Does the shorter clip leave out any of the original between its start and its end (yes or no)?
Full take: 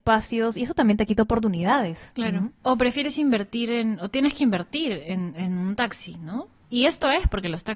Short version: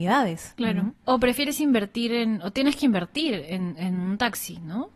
no